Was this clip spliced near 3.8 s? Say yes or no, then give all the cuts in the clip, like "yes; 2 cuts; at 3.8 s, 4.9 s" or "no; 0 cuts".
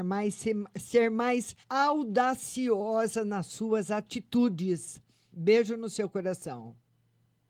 no; 2 cuts; at 1.6 s, 5.3 s